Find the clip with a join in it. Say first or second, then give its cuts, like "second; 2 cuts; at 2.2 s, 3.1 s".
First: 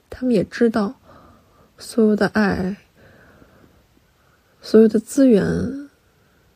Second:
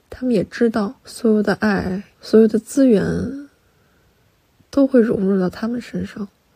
second; 2 cuts; at 1.0 s, 2.1 s